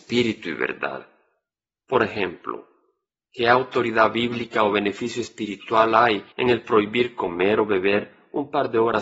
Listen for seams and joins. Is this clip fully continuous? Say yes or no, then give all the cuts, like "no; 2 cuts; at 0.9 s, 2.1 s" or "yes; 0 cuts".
no; 2 cuts; at 1.8 s, 6.3 s